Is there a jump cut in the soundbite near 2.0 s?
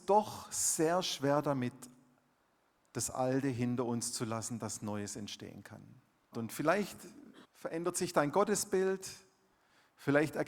no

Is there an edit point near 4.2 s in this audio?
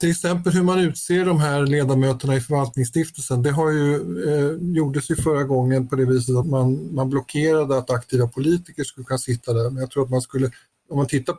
no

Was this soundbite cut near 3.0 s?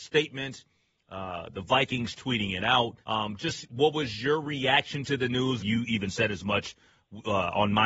yes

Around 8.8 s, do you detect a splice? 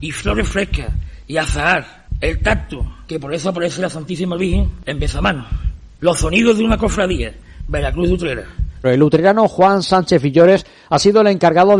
yes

